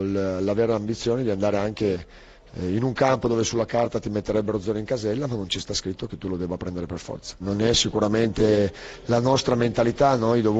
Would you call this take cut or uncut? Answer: cut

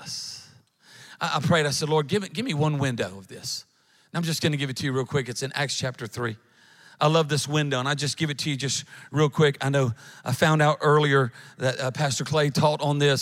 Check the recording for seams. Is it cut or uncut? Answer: uncut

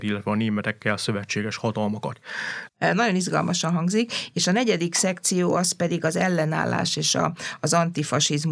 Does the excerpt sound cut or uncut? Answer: cut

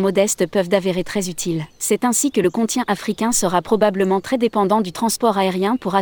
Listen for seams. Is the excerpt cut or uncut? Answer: cut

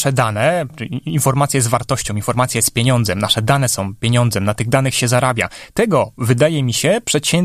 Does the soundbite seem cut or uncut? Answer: uncut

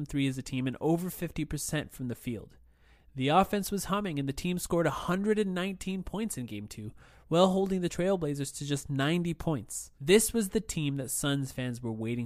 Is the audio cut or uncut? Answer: cut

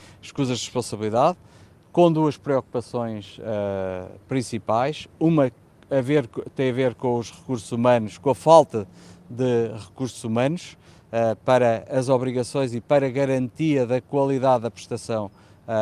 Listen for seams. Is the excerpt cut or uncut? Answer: uncut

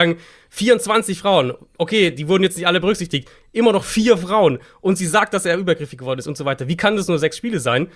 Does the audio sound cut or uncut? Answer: uncut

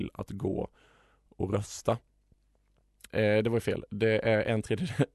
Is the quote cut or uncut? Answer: cut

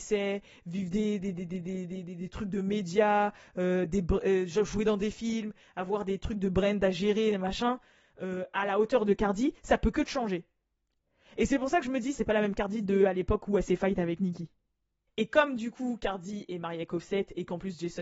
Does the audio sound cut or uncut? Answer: cut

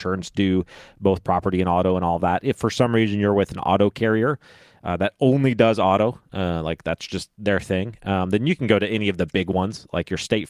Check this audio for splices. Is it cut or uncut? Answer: uncut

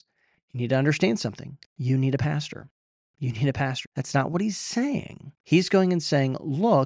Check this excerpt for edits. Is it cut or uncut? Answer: cut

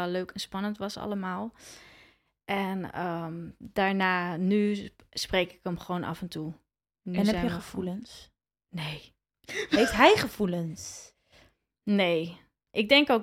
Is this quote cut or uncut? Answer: uncut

